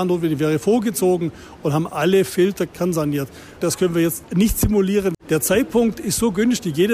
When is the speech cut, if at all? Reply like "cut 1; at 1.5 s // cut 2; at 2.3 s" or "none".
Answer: cut 1; at 3.6 s // cut 2; at 5.1 s